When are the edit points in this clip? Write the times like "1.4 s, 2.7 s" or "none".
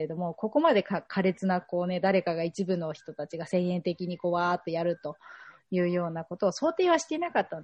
none